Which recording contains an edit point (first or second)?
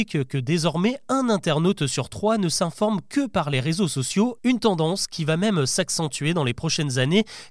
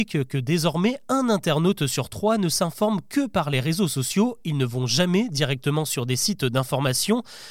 first